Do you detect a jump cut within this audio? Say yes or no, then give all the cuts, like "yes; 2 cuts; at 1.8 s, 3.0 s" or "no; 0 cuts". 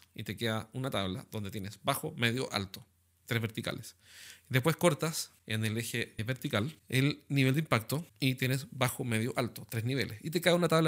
no; 0 cuts